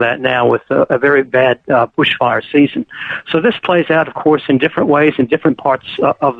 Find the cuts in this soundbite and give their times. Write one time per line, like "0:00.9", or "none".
none